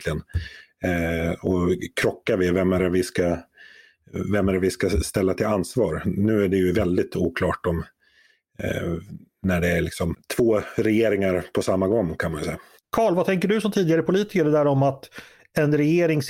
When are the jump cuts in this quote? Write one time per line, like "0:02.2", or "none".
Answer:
none